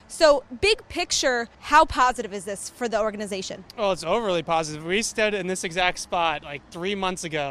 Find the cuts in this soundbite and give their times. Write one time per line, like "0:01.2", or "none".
0:01.5